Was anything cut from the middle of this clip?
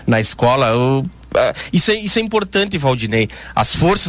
no; 0 cuts

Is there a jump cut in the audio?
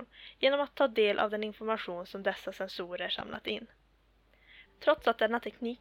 yes; 1 cut; at 4.7 s

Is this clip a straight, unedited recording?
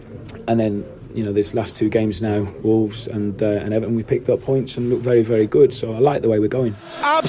yes; 0 cuts

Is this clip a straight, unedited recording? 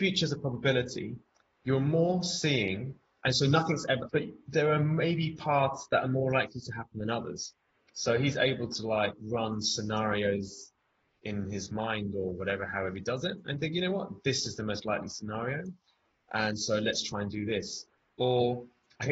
no; 1 cut; at 4.1 s

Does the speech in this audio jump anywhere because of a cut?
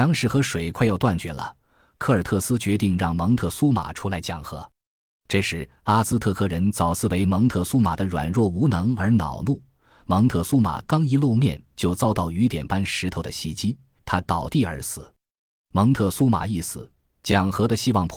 yes; 1 cut; at 14.0 s

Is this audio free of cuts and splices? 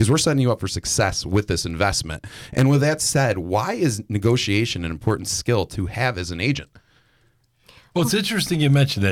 yes; 0 cuts

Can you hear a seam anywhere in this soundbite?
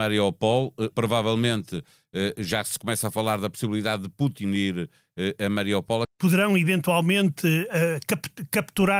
yes; 2 cuts; at 0.9 s, 6.0 s

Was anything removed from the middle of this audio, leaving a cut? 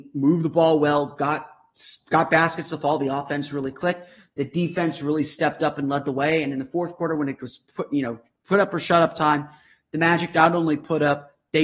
no; 0 cuts

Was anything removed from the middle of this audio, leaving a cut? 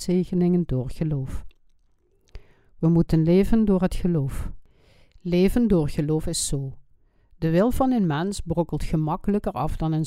no; 0 cuts

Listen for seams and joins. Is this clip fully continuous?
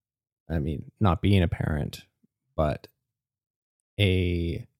yes; 0 cuts

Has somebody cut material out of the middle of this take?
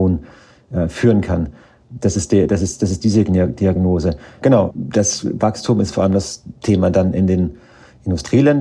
yes; 1 cut; at 4.4 s

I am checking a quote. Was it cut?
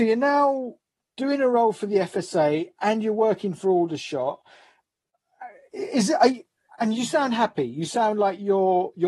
no; 0 cuts

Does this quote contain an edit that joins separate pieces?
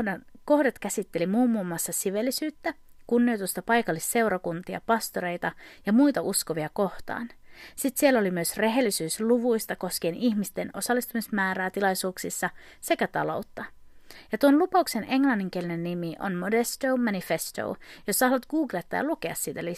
no; 0 cuts

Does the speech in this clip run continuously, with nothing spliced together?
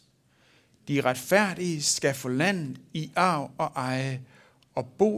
yes; 0 cuts

